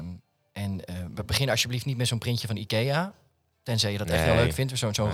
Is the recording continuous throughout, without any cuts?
yes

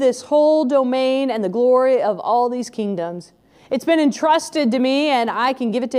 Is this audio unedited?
yes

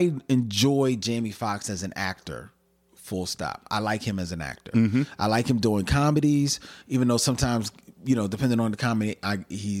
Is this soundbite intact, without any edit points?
yes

